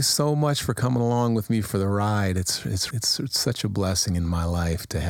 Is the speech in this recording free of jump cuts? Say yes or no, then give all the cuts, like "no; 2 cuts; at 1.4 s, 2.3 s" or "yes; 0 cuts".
no; 1 cut; at 2.9 s